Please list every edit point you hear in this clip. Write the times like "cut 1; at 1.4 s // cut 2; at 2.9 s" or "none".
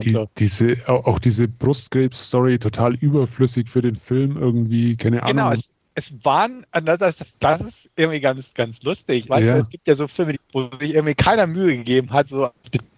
cut 1; at 7.3 s // cut 2; at 9.3 s // cut 3; at 10.3 s